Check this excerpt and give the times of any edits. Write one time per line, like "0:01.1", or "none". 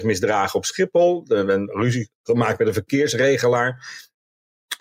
none